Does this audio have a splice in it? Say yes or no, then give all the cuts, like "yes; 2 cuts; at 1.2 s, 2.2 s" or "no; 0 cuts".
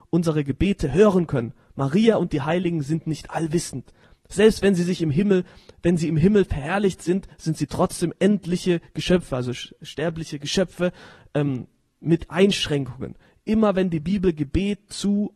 no; 0 cuts